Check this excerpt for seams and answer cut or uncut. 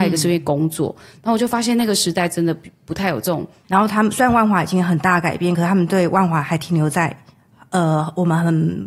cut